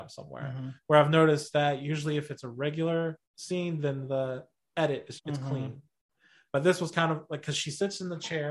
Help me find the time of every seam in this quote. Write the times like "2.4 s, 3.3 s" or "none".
3.2 s, 5.2 s